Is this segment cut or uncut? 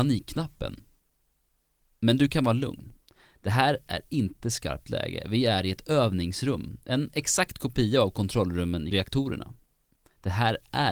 uncut